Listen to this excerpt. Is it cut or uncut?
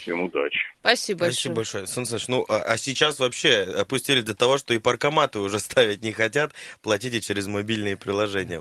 uncut